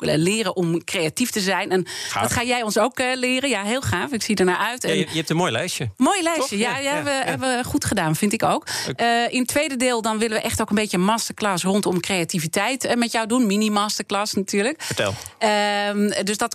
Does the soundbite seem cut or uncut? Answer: uncut